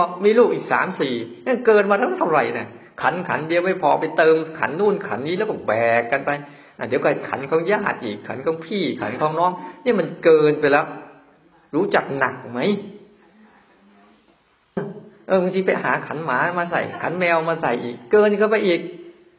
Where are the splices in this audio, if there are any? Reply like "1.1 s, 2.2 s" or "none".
14.8 s